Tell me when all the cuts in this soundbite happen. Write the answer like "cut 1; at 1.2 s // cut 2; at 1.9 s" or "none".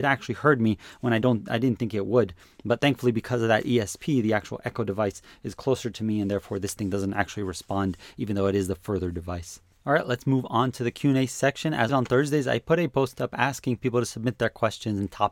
cut 1; at 11.9 s